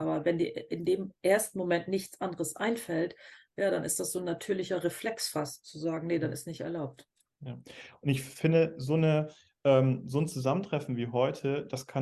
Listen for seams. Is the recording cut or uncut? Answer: uncut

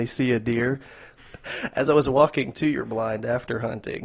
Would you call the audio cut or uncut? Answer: cut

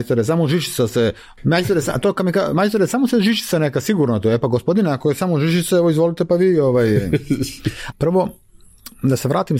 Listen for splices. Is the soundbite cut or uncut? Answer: cut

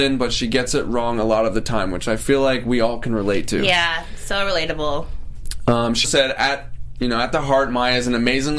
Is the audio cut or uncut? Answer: cut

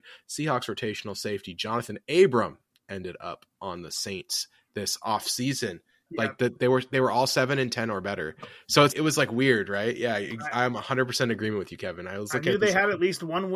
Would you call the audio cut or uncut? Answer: cut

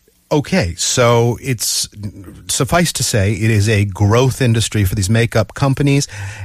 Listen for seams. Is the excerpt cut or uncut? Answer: uncut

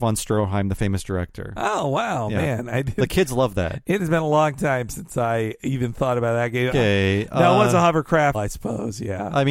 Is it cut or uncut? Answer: cut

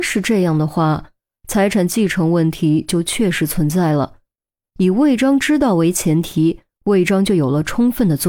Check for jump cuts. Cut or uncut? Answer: uncut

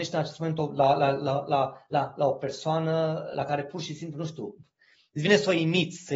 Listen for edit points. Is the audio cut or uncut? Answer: uncut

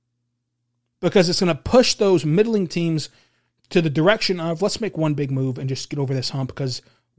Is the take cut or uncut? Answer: uncut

